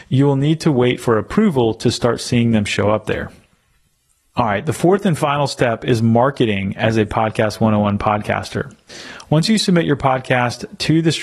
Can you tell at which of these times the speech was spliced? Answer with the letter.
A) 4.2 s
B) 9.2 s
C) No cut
B